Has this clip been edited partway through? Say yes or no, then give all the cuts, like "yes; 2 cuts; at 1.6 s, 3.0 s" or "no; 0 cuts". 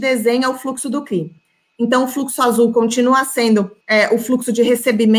yes; 1 cut; at 3.8 s